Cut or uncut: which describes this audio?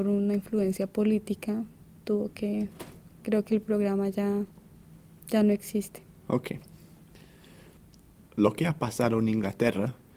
uncut